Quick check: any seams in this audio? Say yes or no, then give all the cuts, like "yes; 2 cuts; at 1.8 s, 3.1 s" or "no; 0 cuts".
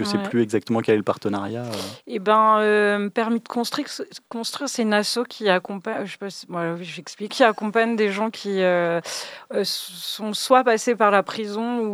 yes; 1 cut; at 7.3 s